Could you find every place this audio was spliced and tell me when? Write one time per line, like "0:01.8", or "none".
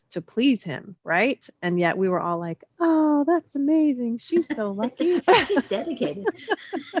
none